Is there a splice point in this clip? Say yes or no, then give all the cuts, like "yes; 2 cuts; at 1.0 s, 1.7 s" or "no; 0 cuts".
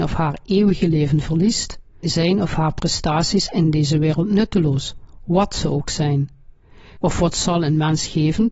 yes; 2 cuts; at 2.0 s, 7.0 s